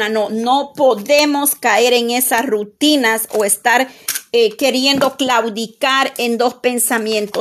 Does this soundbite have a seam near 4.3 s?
no; 0 cuts

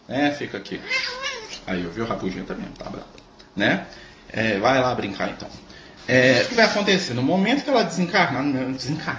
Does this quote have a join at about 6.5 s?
yes; 1 cut; at 6.5 s

